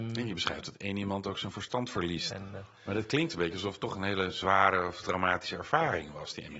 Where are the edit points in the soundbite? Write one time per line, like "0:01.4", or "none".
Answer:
0:02.3